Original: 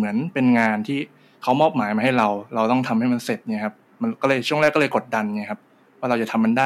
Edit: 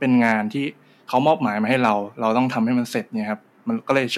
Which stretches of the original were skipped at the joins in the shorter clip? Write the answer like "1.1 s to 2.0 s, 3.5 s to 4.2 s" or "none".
none